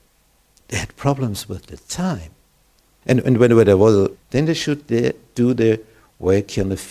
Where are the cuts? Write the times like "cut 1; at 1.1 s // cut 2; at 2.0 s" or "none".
cut 1; at 3.0 s // cut 2; at 4.1 s

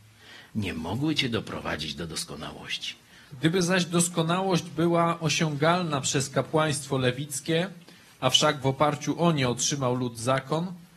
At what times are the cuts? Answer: cut 1; at 3.3 s

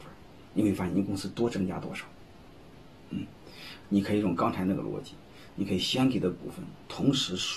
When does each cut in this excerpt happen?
cut 1; at 3.0 s

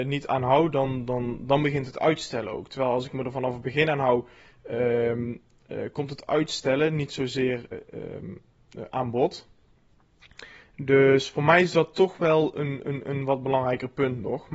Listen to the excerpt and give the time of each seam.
cut 1; at 7.7 s

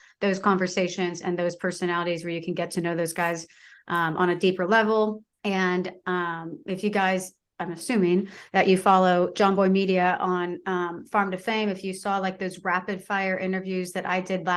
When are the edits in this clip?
cut 1; at 5.3 s

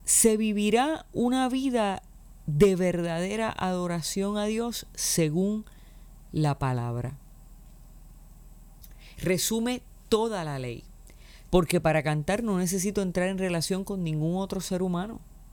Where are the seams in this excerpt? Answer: cut 1; at 9.2 s // cut 2; at 11.5 s

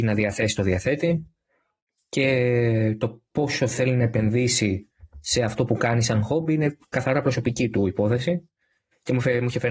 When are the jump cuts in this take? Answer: none

